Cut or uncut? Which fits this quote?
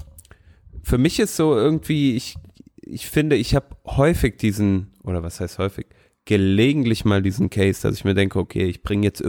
uncut